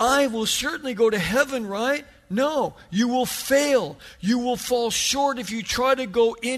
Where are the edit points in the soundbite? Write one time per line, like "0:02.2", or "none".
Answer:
none